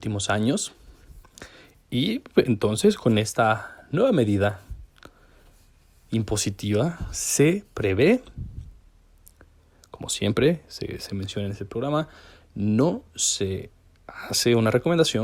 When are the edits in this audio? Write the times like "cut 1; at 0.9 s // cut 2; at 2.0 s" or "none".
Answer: none